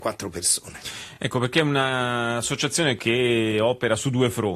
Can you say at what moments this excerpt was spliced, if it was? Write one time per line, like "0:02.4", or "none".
none